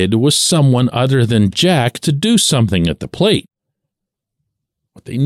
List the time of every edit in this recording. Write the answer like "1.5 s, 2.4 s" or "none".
none